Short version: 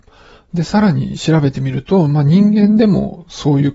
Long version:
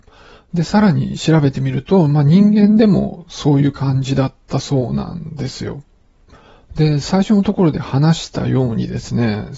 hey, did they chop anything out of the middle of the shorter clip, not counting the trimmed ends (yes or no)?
no